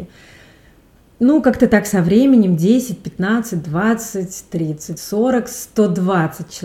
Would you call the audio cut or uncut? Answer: uncut